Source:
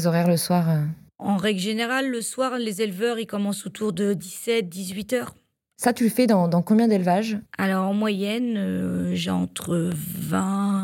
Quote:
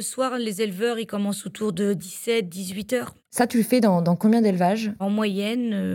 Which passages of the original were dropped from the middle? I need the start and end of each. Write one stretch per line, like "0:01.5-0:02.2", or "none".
0:05.4-0:05.7
0:07.5-0:07.8